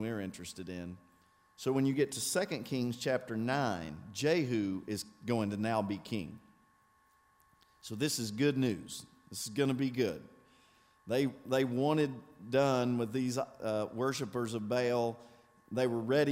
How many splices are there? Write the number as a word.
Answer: zero